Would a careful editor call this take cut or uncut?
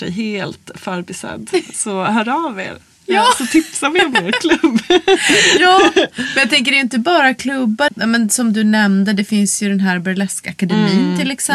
cut